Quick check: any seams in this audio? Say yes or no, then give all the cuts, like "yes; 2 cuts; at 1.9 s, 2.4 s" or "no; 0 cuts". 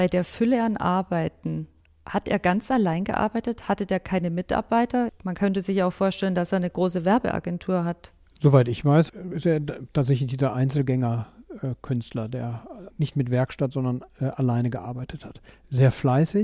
no; 0 cuts